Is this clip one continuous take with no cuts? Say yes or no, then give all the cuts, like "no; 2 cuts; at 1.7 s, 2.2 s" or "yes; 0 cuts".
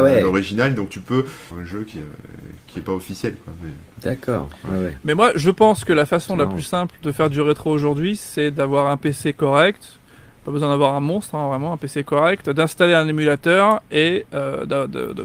no; 1 cut; at 1.5 s